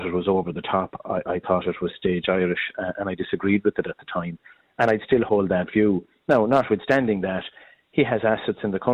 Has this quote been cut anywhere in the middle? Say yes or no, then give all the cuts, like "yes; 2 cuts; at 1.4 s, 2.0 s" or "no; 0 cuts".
no; 0 cuts